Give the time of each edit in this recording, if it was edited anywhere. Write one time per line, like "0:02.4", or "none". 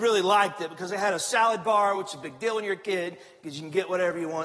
none